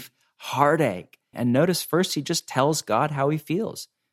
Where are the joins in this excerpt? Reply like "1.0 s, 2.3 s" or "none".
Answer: 1.3 s